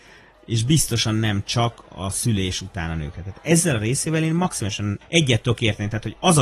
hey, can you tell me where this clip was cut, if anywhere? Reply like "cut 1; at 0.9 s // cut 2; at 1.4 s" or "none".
cut 1; at 5.0 s